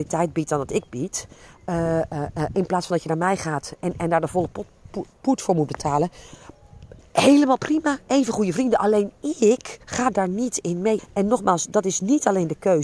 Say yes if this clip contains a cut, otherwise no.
yes